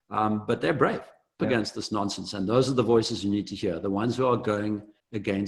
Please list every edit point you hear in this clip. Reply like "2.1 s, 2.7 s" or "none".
1.4 s